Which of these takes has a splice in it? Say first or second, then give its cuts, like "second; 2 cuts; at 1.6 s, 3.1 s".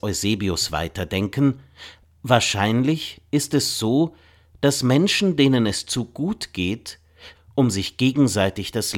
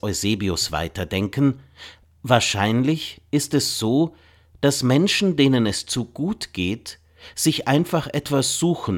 first; 1 cut; at 7.3 s